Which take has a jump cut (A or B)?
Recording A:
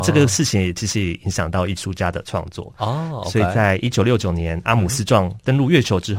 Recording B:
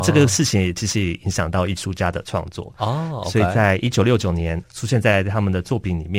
B